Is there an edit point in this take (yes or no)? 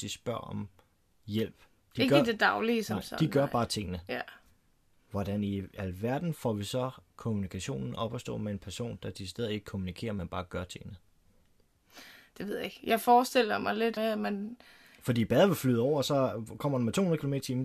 yes